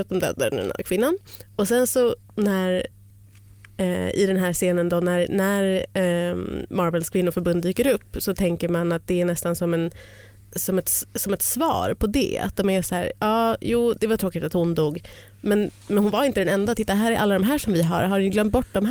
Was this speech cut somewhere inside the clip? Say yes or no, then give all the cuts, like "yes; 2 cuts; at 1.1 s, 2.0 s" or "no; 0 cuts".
no; 0 cuts